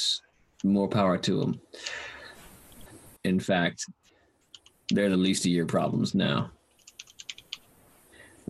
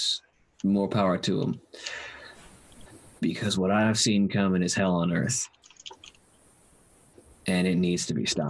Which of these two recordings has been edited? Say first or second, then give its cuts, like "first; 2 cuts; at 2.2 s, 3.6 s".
first; 1 cut; at 3.2 s